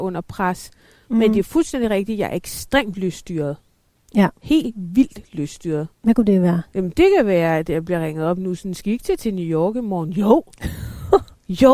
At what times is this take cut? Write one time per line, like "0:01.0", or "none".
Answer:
0:04.4
0:05.9

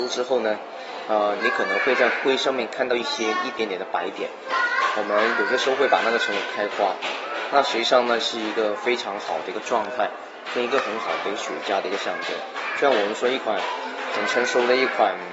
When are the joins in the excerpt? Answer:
0:01.4

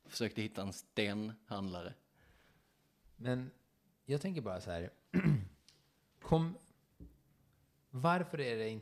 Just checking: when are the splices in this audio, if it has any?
none

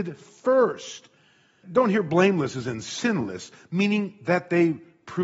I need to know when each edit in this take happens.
0:01.6

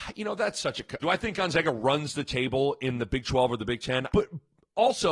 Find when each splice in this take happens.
0:01.0
0:04.1

